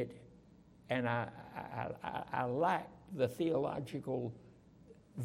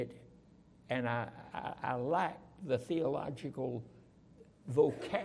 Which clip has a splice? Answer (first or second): second